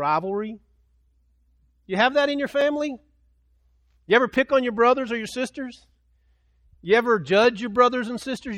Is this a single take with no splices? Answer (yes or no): yes